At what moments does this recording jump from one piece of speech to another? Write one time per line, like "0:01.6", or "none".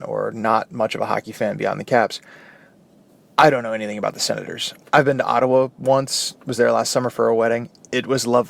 none